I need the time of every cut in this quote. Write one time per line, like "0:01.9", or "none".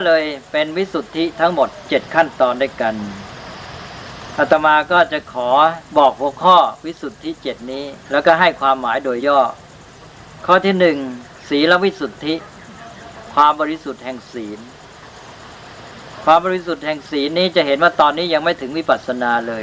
0:05.9
0:08.0
0:09.2